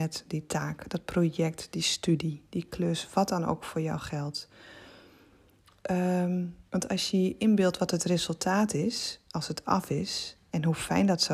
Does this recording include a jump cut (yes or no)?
yes